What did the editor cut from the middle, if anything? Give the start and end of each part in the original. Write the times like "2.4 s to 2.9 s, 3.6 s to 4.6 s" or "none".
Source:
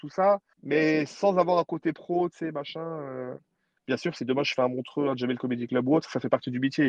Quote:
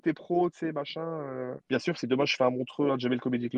3.4 s to 3.8 s